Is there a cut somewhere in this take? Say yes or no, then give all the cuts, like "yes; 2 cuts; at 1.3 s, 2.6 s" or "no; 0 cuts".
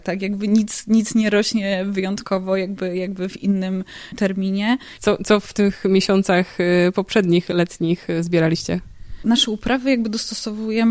yes; 1 cut; at 5.0 s